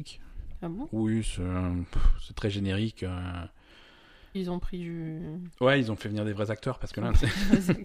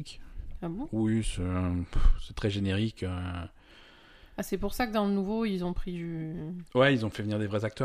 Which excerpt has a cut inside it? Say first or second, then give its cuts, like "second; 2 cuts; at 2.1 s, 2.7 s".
first; 1 cut; at 4.3 s